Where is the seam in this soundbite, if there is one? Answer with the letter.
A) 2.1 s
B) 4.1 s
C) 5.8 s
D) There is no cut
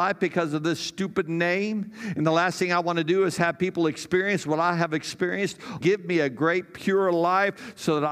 C